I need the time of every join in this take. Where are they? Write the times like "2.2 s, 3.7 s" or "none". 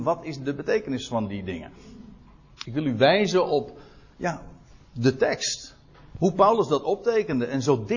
2.6 s